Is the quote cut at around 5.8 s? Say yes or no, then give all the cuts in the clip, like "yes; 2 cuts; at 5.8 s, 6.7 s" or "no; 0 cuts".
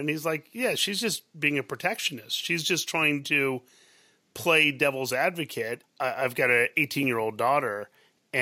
yes; 1 cut; at 5.8 s